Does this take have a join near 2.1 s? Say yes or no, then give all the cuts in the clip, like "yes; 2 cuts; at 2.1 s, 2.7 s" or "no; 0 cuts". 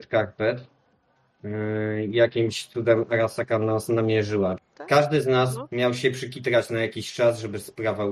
no; 1 cut; at 4.6 s